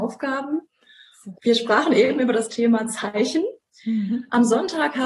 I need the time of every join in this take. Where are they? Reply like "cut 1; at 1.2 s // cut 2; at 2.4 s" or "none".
cut 1; at 1.3 s